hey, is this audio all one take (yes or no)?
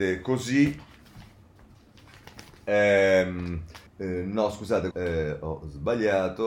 no